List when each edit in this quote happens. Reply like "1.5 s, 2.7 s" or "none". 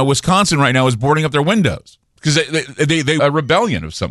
2.1 s, 3.2 s